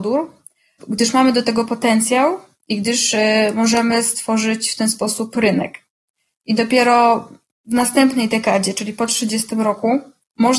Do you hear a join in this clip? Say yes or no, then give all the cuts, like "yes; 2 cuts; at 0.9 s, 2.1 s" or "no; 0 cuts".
no; 0 cuts